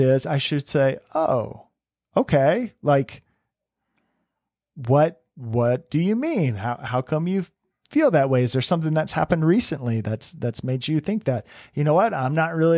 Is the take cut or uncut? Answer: uncut